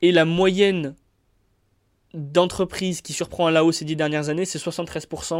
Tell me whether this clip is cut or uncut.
uncut